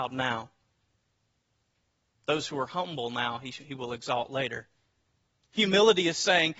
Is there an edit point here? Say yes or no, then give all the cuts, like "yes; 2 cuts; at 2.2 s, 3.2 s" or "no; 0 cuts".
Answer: yes; 1 cut; at 5.4 s